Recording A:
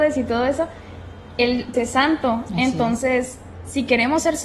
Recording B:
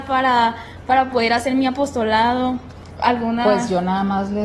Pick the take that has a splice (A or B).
A